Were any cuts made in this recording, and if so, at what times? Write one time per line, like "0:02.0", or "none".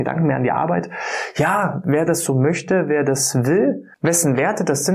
0:03.9